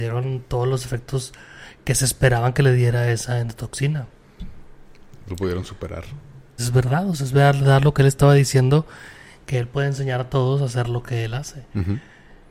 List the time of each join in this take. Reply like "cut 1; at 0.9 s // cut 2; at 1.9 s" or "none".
cut 1; at 6.6 s